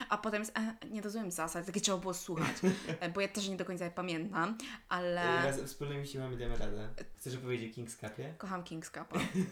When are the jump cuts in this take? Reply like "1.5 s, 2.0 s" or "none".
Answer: 7.1 s